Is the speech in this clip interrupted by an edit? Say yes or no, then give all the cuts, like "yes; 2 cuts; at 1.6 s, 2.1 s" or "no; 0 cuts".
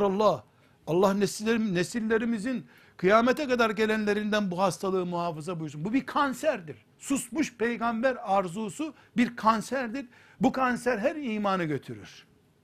yes; 1 cut; at 6.9 s